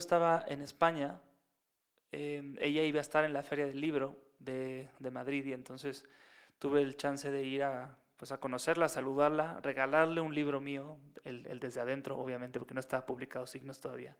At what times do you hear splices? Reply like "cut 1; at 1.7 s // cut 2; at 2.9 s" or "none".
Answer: none